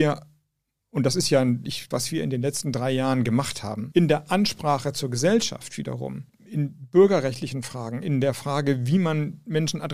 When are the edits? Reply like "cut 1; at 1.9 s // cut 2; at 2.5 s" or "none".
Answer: cut 1; at 1.9 s // cut 2; at 3.9 s // cut 3; at 6.3 s